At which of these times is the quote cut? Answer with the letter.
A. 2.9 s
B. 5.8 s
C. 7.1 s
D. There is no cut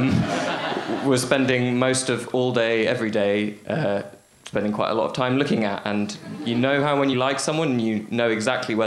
C